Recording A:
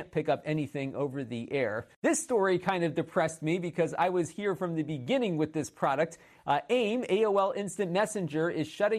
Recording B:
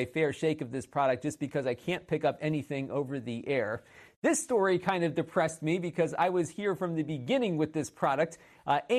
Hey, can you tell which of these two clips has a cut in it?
A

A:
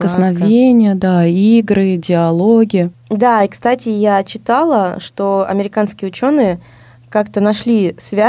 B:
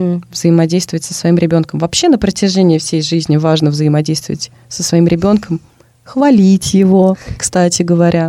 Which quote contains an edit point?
A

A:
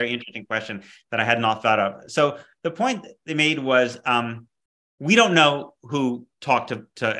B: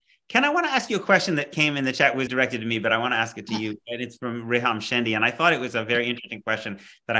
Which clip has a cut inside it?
B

